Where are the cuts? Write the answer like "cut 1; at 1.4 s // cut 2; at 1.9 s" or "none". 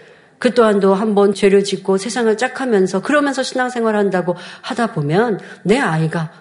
cut 1; at 1.3 s